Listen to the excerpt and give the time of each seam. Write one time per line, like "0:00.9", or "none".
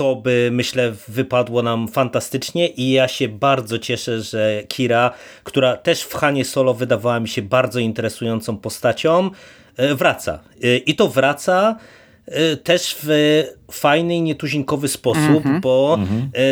none